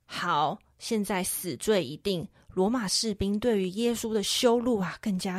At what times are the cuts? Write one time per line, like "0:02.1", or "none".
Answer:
none